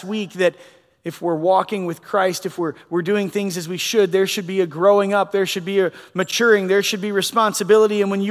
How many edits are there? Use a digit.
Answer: 0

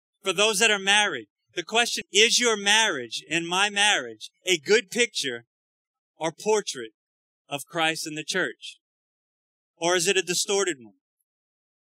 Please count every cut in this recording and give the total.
1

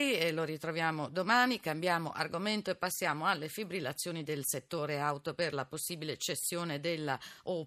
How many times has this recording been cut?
0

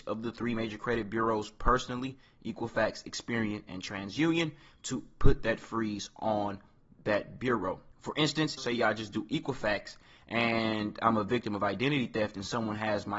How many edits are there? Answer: 1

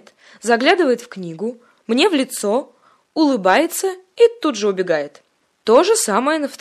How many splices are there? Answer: 0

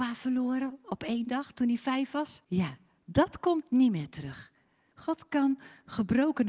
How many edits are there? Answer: 2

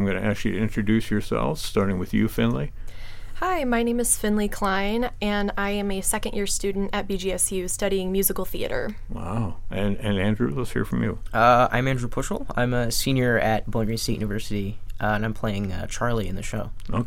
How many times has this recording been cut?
0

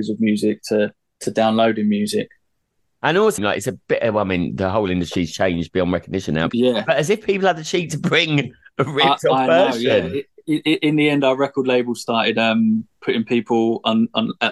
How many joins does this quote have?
2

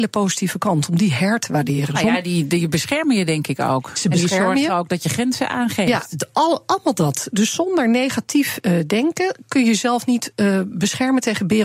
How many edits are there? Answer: 0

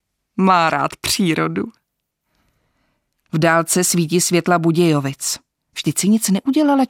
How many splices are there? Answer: 2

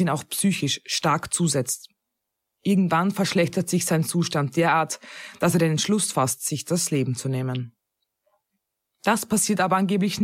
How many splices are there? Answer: 0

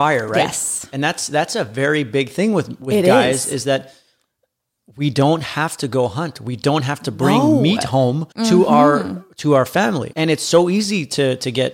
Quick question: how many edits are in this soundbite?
2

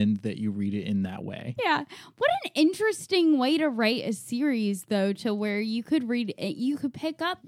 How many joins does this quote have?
1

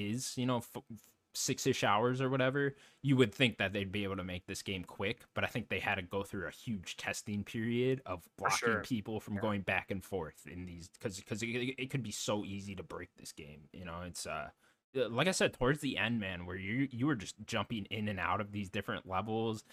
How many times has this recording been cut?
1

